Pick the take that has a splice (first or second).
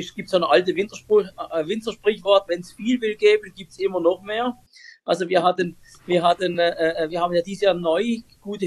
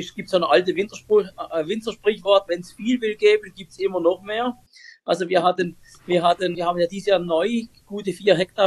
second